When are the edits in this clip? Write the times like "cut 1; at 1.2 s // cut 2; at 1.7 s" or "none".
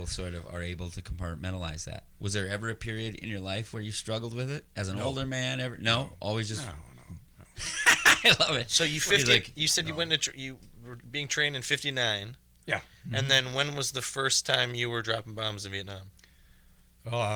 none